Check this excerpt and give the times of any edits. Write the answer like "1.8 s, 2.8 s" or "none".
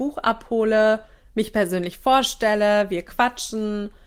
none